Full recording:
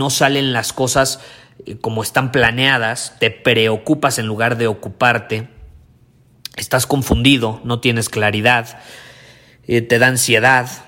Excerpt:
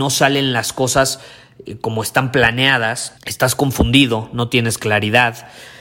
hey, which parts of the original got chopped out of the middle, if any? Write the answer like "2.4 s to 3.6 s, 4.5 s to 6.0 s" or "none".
3.2 s to 6.5 s

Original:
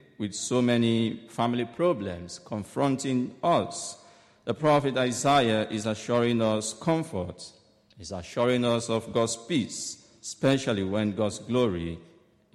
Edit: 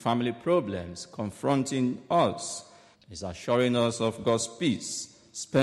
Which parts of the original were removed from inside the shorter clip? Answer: 4.3 s to 7.8 s

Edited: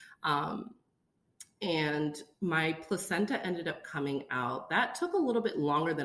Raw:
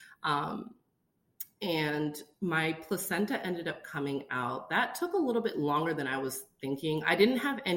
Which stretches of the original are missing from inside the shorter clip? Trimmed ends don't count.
none

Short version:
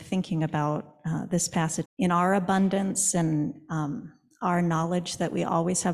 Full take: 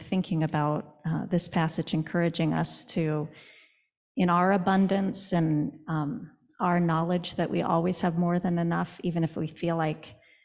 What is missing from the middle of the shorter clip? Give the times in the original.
1.8 s to 4.0 s

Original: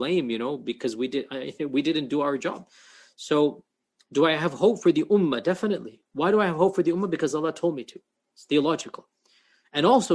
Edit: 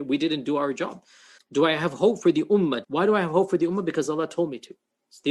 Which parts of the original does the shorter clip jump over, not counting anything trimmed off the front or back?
3.0 s to 4.0 s, 5.4 s to 6.1 s

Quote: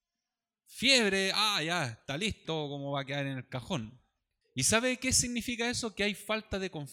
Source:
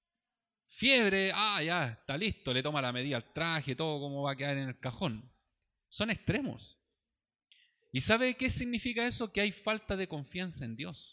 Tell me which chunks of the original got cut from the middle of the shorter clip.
2.4 s to 3.8 s, 5.7 s to 7.8 s

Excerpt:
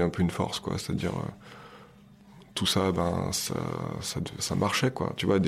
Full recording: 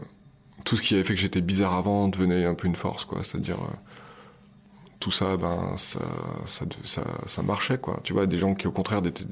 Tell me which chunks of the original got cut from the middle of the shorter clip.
6.8 s to 7.2 s

